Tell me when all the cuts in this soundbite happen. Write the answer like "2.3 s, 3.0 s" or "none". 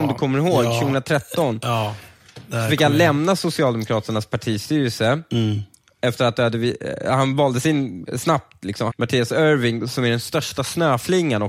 8.9 s